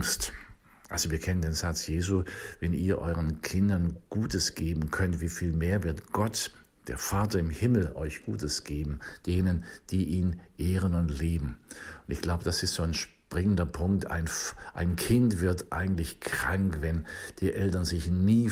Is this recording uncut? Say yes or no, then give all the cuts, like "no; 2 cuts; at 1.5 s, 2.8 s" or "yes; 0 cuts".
yes; 0 cuts